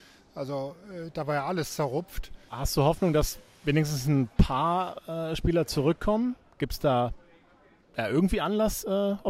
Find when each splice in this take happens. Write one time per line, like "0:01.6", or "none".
0:02.5